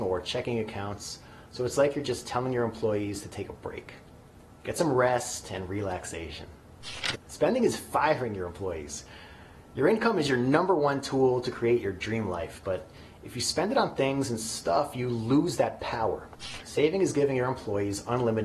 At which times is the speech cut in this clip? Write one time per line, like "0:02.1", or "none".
0:07.1
0:16.6